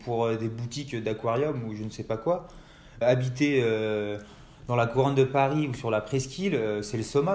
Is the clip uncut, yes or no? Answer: no